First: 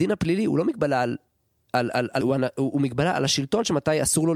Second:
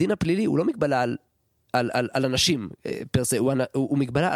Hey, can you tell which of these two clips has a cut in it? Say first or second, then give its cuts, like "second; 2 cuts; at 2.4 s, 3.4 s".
first; 1 cut; at 2.2 s